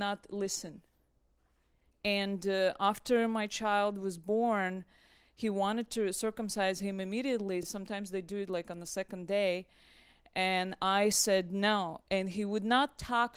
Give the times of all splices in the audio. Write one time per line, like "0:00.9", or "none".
none